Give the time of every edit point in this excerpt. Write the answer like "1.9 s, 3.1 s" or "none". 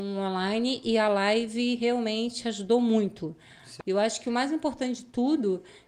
3.8 s

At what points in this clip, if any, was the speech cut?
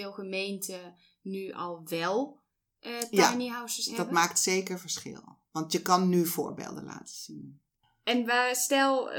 none

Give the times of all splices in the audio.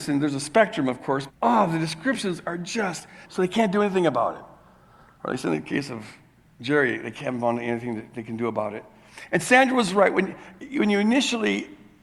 1.3 s, 3.2 s

